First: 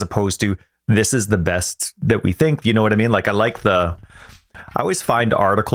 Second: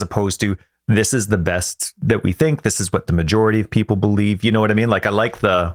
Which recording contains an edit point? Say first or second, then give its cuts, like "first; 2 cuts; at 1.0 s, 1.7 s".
first; 1 cut; at 2.6 s